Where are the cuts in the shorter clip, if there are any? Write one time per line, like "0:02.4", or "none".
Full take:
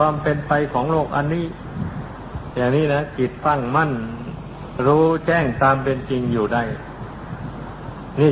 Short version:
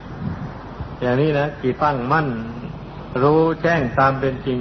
0:01.8